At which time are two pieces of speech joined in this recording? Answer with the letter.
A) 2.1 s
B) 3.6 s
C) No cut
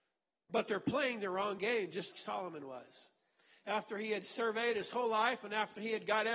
A